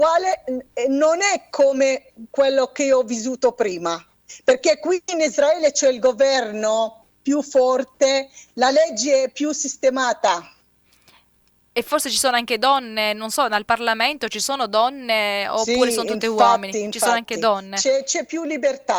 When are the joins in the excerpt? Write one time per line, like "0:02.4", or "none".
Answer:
none

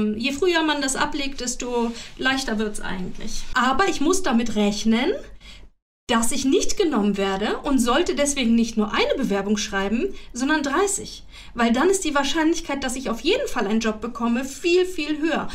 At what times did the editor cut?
0:03.5

